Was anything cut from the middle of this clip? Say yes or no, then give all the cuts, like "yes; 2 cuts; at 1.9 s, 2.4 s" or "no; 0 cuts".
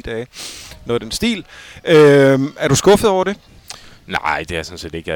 no; 0 cuts